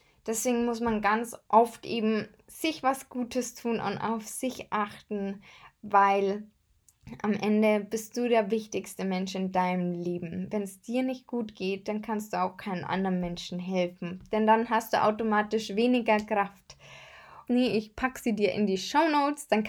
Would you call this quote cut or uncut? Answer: cut